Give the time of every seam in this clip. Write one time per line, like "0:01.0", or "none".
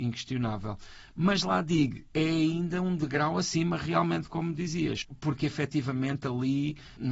none